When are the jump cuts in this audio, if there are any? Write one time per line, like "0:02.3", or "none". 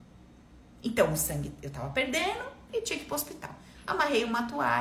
none